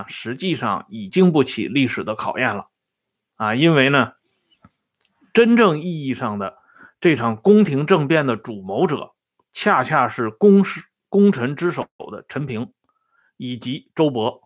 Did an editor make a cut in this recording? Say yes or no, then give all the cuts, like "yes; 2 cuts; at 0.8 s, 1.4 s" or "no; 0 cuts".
yes; 1 cut; at 1.1 s